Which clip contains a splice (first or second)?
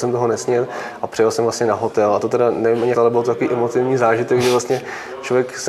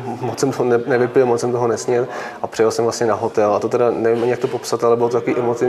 first